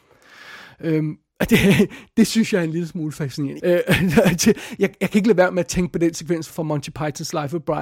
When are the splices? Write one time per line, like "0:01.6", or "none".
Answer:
0:03.6
0:06.5